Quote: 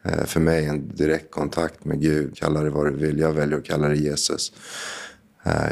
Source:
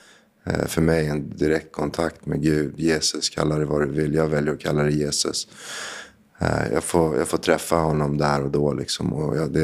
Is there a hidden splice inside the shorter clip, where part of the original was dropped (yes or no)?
yes